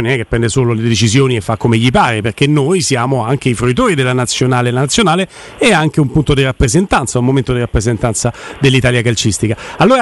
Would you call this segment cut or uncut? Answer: uncut